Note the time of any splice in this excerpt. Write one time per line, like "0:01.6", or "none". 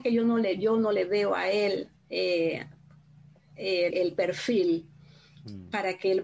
0:02.0
0:03.9